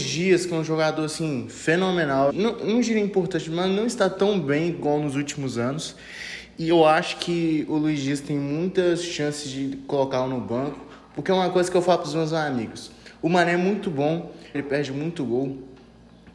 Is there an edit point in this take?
yes; 2 cuts; at 2.3 s, 14.5 s

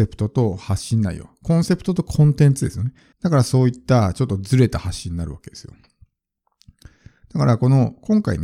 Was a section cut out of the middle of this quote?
yes; 1 cut; at 3.1 s

